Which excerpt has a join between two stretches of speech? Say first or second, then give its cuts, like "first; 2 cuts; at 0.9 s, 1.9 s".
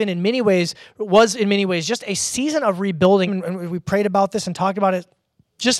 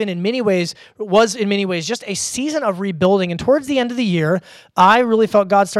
first; 1 cut; at 3.3 s